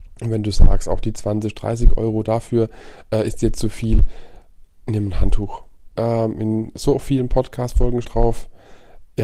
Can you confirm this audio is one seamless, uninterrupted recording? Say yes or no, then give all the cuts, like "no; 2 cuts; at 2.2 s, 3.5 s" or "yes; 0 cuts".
no; 2 cuts; at 6.0 s, 8.0 s